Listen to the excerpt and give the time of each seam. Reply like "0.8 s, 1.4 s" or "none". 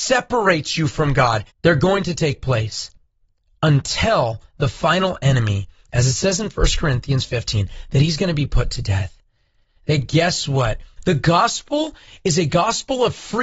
1.5 s, 11.0 s

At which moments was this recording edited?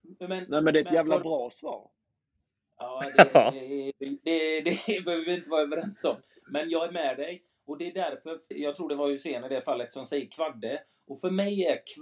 8.5 s

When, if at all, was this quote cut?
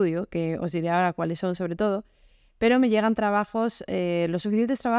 none

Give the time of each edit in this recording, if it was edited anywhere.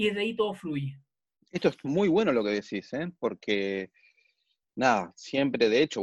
none

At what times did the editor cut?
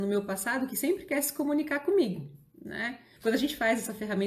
3.2 s

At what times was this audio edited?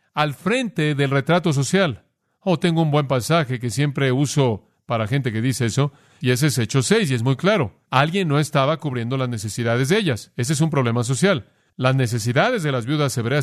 7.8 s

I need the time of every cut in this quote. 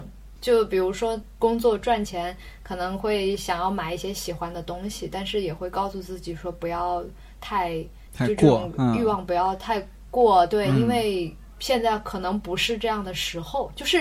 none

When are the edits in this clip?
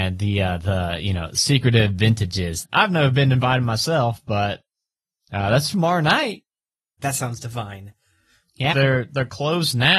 2.6 s, 7.0 s, 8.7 s

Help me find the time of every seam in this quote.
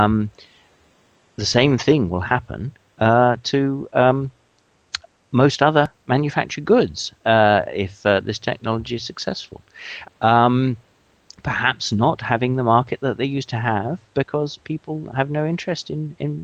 10.0 s

